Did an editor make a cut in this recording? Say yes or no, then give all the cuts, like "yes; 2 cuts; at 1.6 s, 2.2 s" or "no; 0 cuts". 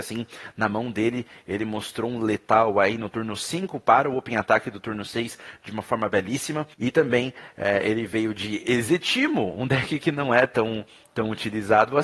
yes; 1 cut; at 6.7 s